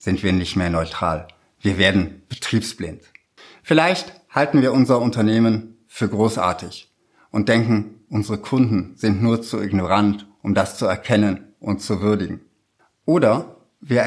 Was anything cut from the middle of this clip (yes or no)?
no